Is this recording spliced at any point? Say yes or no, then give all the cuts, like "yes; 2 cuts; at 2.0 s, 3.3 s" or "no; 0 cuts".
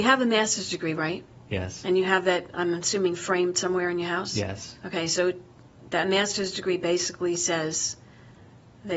no; 0 cuts